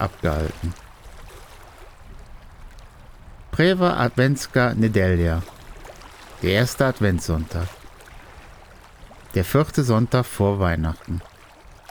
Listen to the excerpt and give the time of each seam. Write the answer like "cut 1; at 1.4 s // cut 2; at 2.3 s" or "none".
none